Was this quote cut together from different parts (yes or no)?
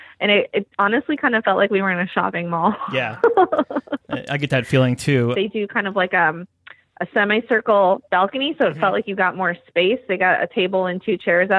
yes